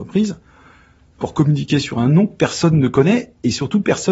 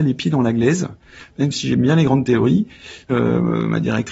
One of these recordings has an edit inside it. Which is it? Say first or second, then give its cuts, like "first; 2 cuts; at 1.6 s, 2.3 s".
second; 1 cut; at 3.1 s